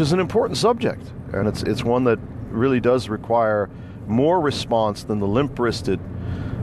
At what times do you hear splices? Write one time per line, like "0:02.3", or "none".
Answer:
none

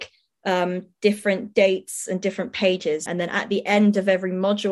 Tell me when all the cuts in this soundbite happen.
0:03.1

